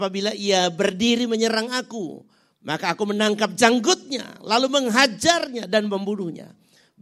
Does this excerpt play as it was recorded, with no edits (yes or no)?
yes